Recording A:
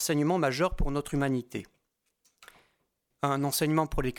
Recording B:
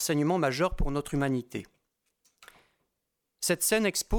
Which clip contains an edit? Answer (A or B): A